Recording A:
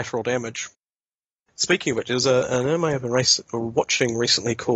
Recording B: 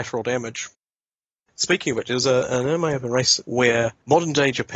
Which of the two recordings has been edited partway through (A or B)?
B